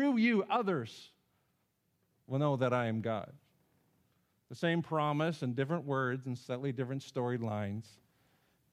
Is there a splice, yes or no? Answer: no